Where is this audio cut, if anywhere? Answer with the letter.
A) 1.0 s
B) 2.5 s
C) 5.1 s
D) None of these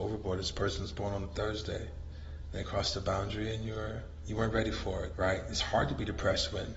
C